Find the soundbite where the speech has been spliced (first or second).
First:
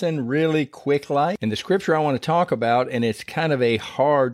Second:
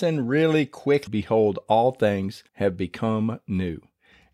second